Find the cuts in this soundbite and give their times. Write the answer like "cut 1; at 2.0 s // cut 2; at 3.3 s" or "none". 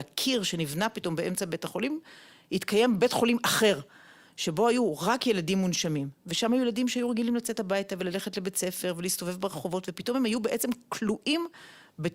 none